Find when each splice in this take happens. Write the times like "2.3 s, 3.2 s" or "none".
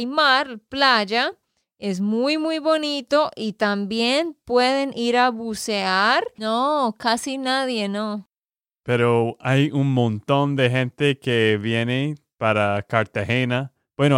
6.4 s